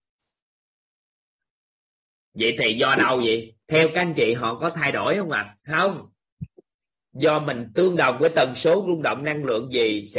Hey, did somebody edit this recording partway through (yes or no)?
yes